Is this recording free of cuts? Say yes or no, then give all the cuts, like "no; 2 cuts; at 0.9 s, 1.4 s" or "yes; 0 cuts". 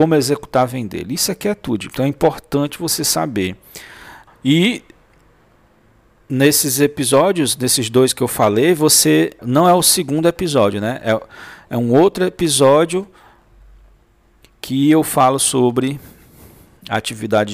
no; 2 cuts; at 4.3 s, 9.4 s